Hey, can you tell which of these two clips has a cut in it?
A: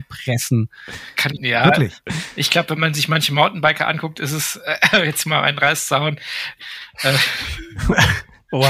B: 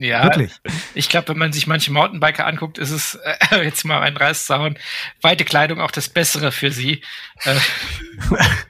A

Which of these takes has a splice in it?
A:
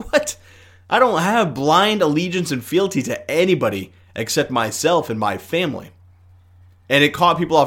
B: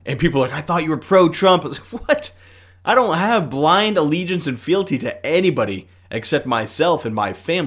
B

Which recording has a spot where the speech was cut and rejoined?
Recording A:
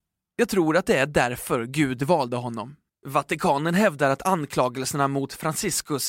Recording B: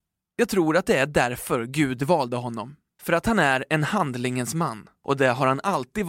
A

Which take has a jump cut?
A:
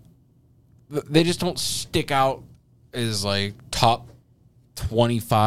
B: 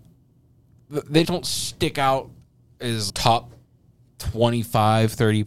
B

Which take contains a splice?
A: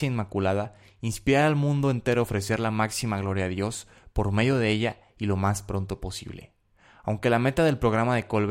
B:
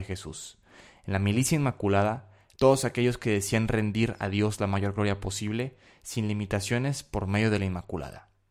B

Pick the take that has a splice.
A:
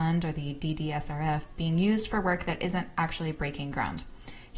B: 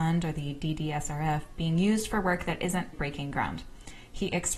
B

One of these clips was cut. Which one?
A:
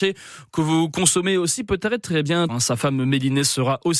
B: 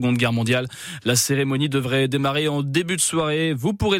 A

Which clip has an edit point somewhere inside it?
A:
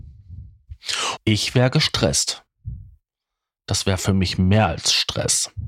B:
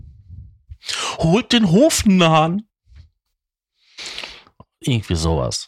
A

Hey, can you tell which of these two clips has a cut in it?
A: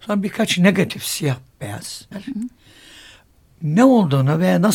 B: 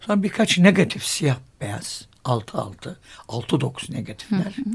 A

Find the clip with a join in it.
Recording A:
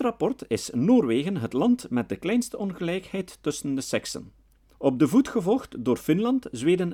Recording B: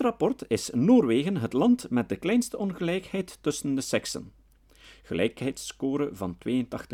A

